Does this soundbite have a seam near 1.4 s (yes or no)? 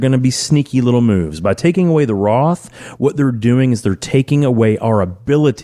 no